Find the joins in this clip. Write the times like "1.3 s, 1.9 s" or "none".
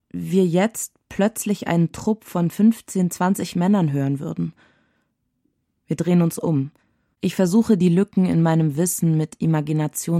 7.1 s